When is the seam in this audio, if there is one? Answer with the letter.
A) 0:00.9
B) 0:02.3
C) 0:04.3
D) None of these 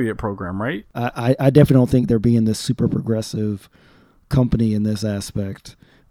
A